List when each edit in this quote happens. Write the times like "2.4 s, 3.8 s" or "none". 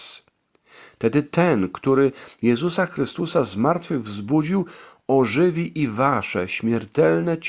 none